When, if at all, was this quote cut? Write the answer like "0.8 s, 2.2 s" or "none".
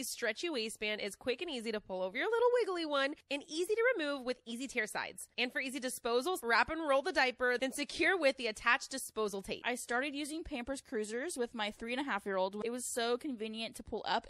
6.4 s